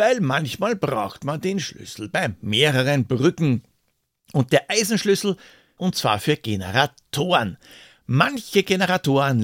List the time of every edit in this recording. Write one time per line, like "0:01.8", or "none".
0:05.8

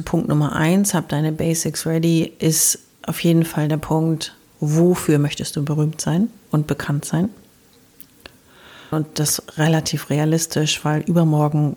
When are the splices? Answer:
0:08.9

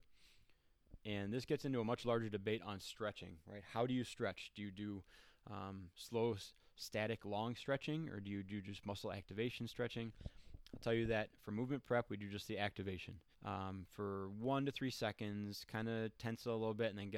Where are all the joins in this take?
0:13.3

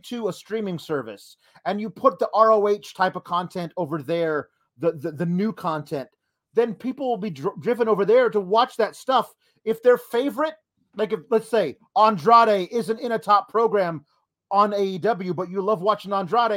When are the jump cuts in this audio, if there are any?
none

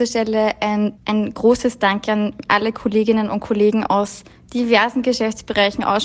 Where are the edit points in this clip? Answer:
0:00.9

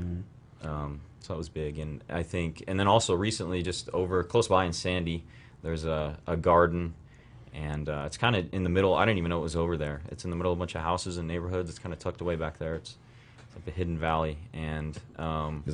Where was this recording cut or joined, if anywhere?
none

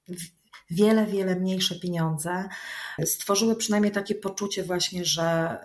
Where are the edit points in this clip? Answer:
0:03.0

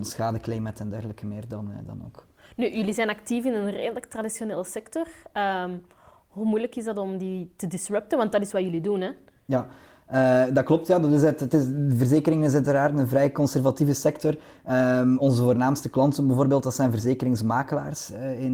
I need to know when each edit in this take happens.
none

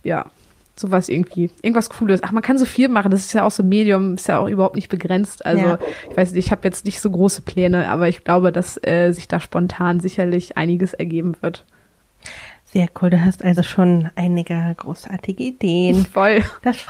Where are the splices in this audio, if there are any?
none

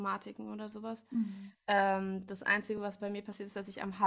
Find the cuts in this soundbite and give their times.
none

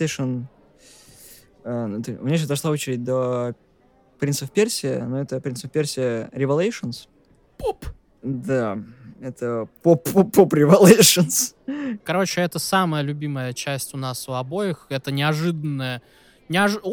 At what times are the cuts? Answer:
0:12.0

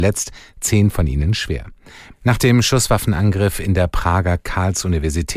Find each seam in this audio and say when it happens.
0:02.1

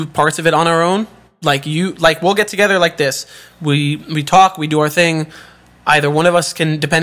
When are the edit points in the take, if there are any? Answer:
none

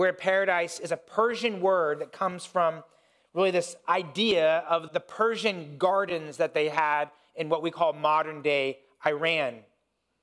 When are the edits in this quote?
0:04.9

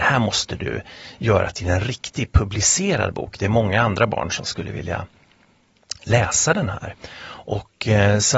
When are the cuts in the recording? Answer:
none

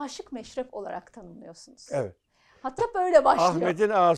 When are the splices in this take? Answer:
0:02.8

